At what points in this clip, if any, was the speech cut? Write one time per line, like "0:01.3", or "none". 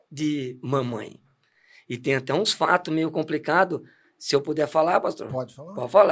none